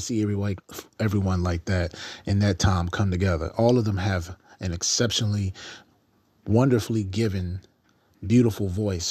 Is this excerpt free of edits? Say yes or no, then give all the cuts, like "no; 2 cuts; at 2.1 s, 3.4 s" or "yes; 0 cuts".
yes; 0 cuts